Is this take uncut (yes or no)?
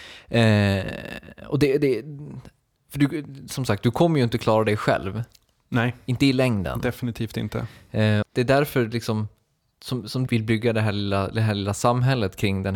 no